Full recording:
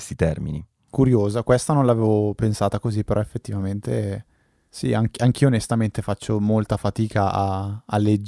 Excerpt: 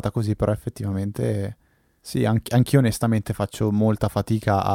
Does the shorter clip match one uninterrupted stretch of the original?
yes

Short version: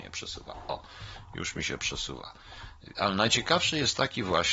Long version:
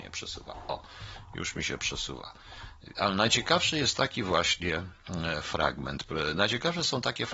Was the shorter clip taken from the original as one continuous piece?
yes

